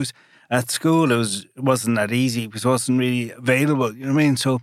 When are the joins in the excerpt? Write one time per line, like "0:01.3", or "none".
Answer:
none